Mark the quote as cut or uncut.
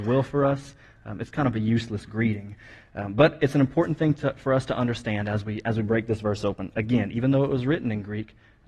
uncut